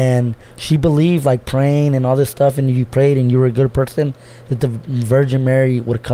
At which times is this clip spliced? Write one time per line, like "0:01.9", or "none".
none